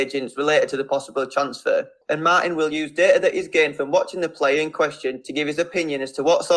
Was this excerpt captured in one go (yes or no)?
no